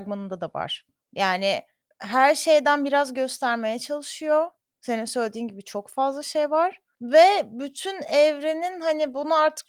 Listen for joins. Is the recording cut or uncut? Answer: uncut